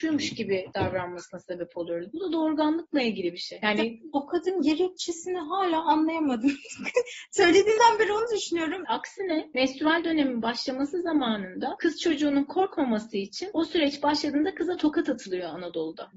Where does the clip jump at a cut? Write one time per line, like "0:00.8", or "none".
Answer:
0:08.8